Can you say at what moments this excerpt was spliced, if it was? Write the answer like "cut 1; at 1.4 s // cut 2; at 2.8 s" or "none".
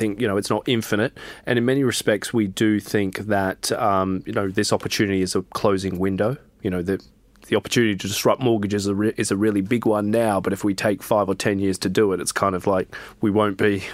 none